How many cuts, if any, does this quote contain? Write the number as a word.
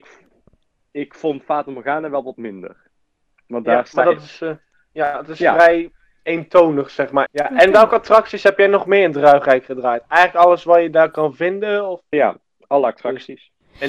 two